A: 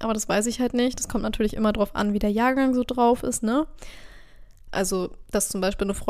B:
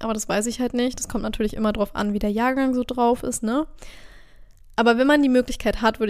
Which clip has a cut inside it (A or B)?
A